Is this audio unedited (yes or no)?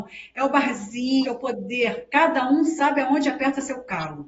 no